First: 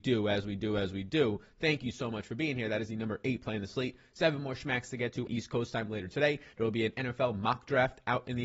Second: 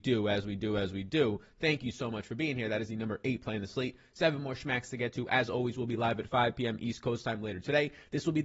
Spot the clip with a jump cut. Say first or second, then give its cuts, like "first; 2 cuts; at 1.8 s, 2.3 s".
first; 2 cuts; at 5.3 s, 6.5 s